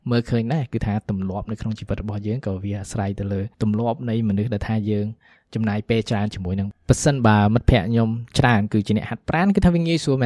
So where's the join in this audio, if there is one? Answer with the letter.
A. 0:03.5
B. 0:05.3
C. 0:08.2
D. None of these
A